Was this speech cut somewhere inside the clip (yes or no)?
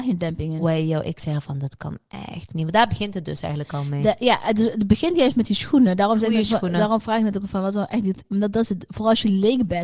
no